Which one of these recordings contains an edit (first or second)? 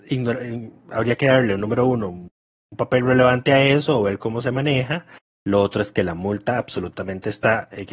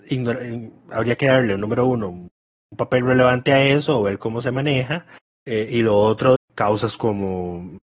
second